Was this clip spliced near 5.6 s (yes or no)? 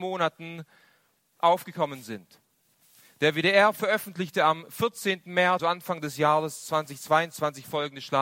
yes